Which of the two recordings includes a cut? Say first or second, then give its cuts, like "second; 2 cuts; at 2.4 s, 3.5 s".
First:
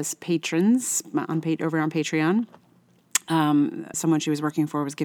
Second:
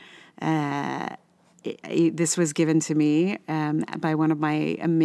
first; 1 cut; at 3.9 s